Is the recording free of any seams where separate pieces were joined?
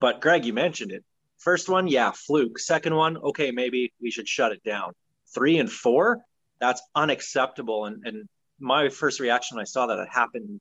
yes; 0 cuts

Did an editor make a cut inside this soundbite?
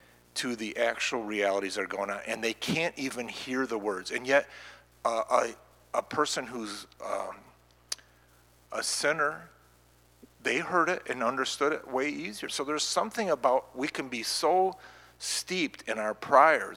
yes; 1 cut; at 12.5 s

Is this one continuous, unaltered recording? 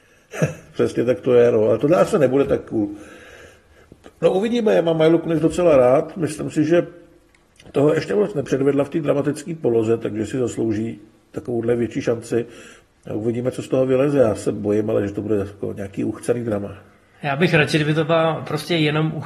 yes; 0 cuts

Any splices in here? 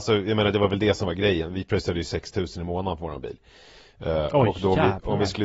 no; 0 cuts

